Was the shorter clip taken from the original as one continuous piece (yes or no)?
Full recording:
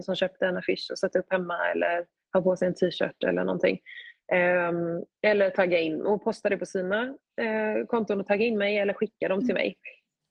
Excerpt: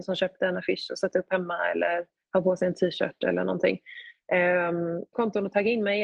no